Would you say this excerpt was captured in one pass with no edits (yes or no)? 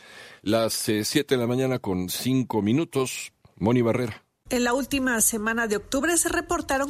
no